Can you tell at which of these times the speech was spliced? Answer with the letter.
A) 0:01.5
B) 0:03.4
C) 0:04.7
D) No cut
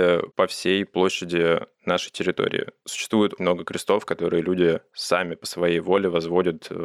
B